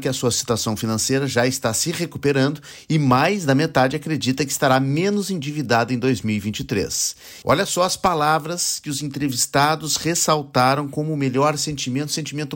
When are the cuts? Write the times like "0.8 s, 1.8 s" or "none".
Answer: 7.4 s